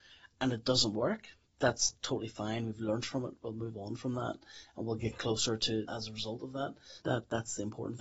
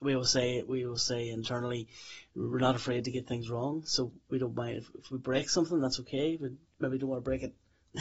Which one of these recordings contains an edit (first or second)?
first